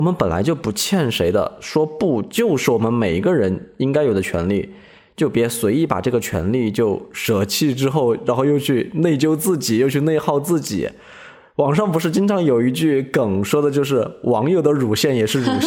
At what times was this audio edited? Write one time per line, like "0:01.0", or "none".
none